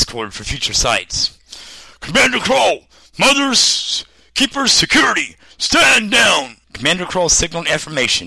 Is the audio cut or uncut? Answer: cut